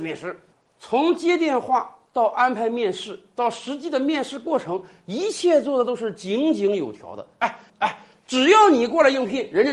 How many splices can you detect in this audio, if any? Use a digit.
1